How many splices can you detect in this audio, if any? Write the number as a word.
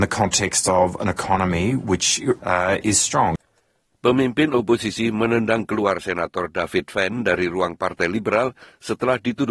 one